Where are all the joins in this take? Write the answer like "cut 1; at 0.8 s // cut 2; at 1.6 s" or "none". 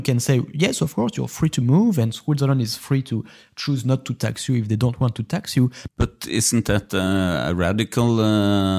cut 1; at 5.9 s